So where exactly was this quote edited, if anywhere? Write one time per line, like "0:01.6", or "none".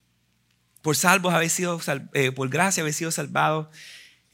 none